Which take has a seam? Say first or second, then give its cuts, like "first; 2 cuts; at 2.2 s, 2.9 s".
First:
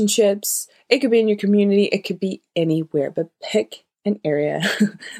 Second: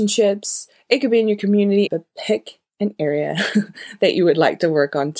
second; 1 cut; at 1.9 s